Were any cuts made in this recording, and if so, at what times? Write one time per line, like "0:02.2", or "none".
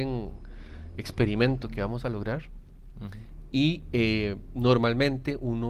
none